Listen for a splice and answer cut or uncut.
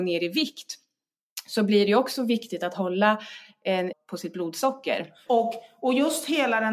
cut